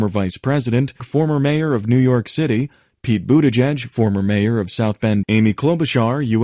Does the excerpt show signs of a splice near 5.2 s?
yes; 2 cuts; at 1.0 s, 5.2 s

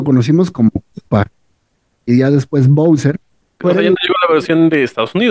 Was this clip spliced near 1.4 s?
no; 1 cut; at 3.5 s

